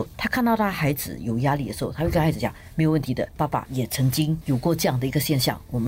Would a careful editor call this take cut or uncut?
uncut